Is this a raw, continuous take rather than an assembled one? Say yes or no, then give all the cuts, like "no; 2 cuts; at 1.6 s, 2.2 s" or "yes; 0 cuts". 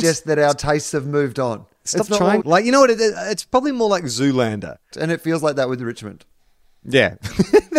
no; 2 cuts; at 2.4 s, 4.9 s